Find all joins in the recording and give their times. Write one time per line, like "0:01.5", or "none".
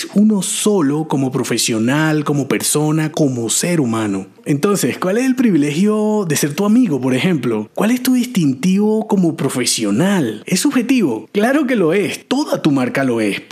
0:03.1

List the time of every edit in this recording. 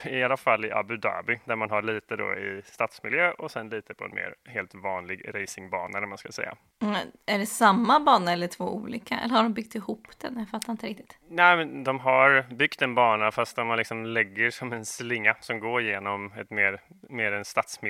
none

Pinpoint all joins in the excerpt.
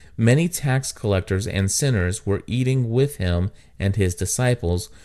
none

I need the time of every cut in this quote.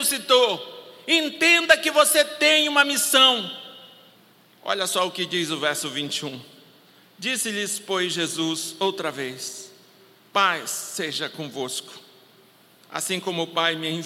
none

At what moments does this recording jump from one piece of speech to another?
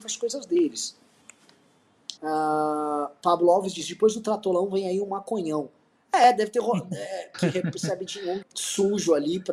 0:02.2
0:07.3
0:08.4

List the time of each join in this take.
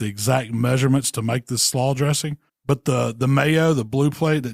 0:02.5

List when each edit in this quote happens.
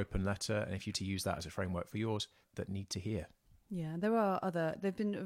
0:00.9
0:02.4

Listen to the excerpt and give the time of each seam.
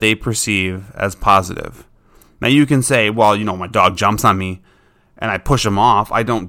none

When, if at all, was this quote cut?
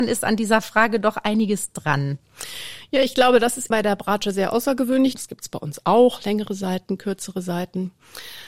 0:03.7
0:05.1

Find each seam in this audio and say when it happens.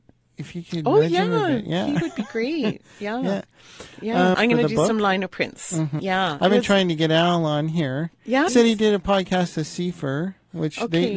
0:04.3
0:06.0
0:08.5

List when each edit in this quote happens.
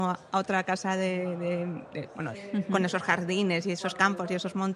0:02.3

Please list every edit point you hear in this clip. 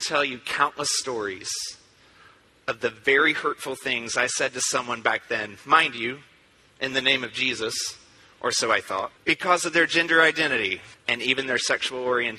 0:09.2
0:10.9

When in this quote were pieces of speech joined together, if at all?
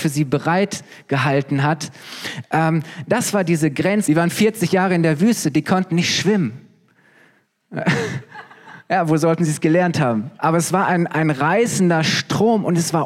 0:04.0
0:10.4

